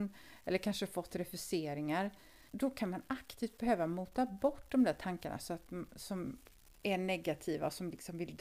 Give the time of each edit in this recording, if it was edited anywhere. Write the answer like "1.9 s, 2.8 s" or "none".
2.5 s